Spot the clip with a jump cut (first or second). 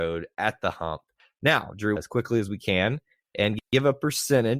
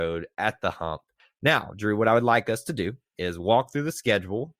first